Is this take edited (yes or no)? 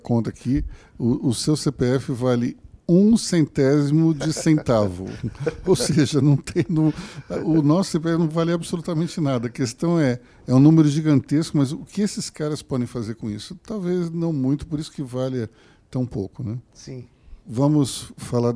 yes